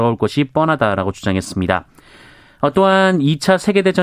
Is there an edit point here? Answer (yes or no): no